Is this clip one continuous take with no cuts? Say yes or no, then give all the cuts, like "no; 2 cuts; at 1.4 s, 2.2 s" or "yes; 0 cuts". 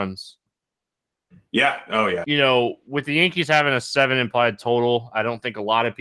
no; 1 cut; at 2.2 s